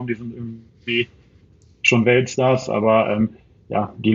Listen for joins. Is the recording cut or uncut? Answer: uncut